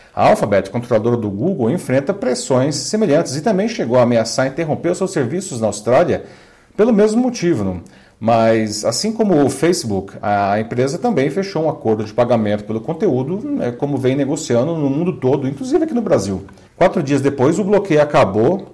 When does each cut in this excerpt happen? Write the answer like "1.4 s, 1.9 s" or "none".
16.7 s